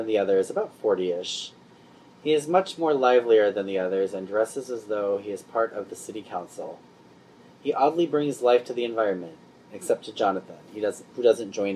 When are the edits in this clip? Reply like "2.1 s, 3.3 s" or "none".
none